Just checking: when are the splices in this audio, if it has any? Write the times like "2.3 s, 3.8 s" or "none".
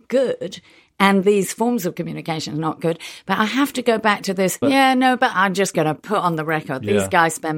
4.6 s